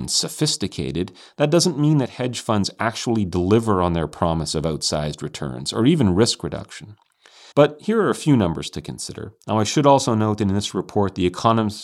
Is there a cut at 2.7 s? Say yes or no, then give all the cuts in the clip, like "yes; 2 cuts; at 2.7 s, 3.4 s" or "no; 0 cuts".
no; 2 cuts; at 7.5 s, 9.4 s